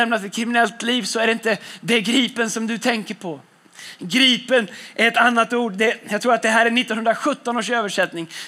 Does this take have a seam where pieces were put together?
no; 0 cuts

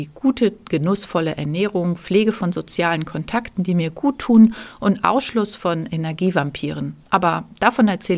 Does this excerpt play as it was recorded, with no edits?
no; 1 cut; at 7.0 s

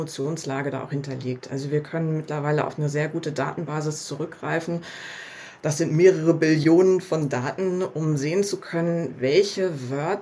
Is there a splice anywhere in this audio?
no; 0 cuts

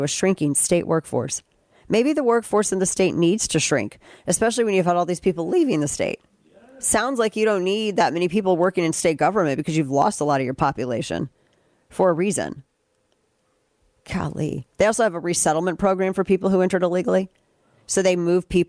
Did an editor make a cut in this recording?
no; 0 cuts

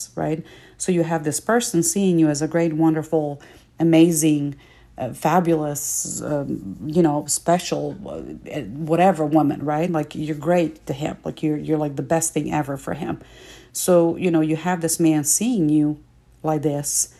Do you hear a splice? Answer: no; 0 cuts

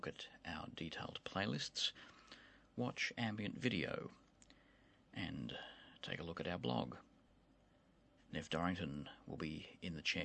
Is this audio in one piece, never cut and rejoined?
no; 1 cut; at 8.2 s

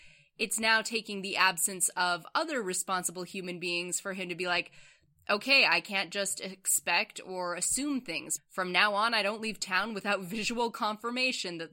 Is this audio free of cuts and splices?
no; 1 cut; at 8.4 s

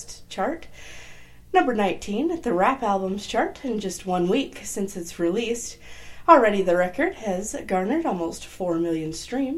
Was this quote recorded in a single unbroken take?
yes; 0 cuts

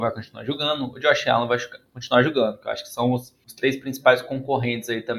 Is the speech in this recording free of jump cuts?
yes; 0 cuts

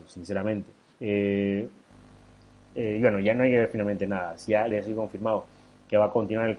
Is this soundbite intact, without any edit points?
no; 2 cuts; at 0.9 s, 4.7 s

